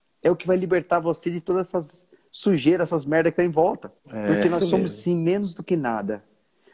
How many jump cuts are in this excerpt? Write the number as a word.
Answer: one